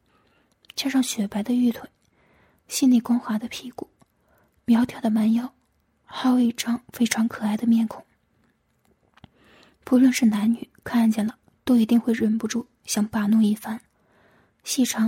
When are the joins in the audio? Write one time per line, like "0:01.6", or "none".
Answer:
none